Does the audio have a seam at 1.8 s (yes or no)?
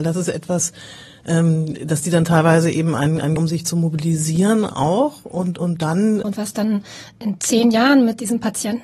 no